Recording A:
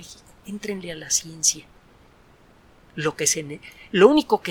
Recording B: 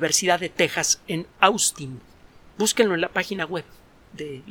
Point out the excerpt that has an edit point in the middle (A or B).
B